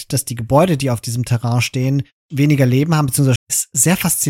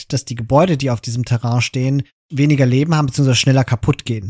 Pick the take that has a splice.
first; 1 cut; at 3.4 s

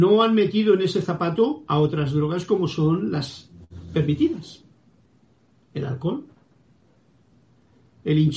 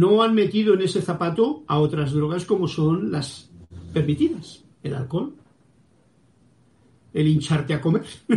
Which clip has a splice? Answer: second; 1 cut; at 4.7 s

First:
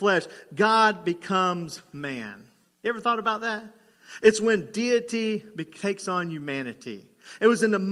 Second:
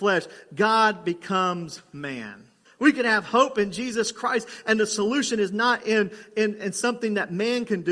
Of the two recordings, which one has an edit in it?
second; 1 cut; at 2.6 s

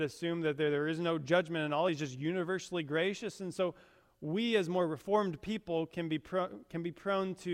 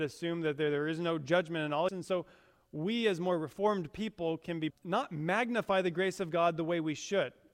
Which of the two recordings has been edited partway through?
second; 2 cuts; at 1.9 s, 4.7 s

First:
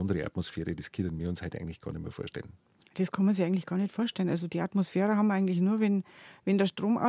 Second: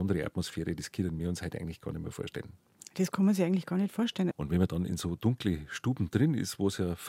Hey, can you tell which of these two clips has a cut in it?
second; 1 cut; at 4.3 s

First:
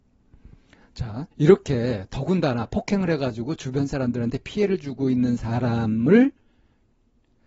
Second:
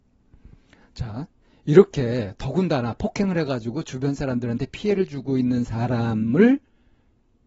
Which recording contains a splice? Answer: first; 1 cut; at 1.3 s

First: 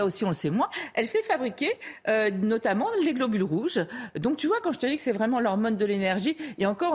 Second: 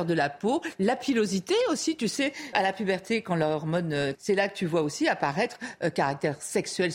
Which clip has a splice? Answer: second; 2 cuts; at 2.5 s, 4.1 s

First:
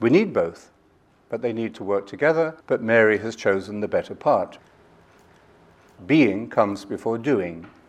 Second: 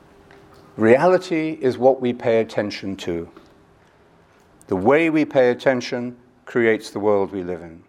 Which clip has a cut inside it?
first; 1 cut; at 2.6 s

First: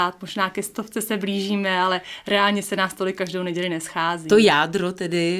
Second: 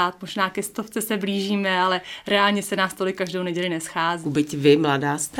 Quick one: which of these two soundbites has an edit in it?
second; 1 cut; at 4.2 s

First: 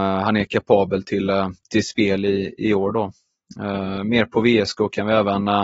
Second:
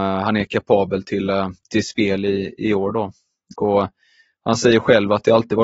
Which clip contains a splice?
second; 1 cut; at 3.5 s

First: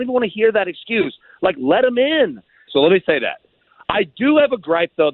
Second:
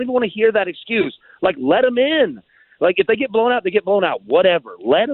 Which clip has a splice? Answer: first; 1 cut; at 2.7 s

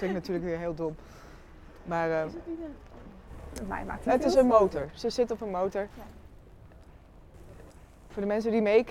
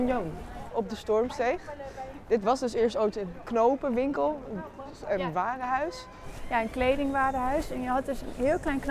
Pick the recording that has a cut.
first; 2 cuts; at 4.1 s, 5.9 s

